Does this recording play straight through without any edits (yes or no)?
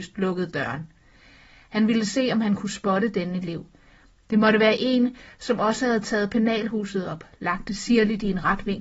yes